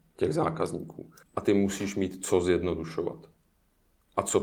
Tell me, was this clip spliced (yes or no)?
yes